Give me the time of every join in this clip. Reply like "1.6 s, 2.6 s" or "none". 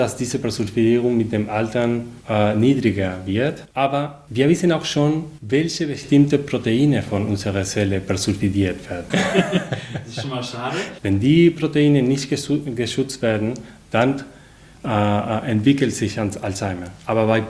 9.1 s, 11.0 s

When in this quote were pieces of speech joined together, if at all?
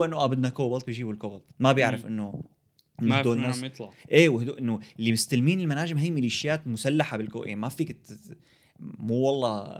1.5 s

